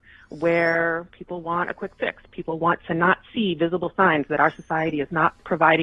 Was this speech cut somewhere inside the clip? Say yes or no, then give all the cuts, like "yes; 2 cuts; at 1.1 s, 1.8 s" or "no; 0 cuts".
no; 0 cuts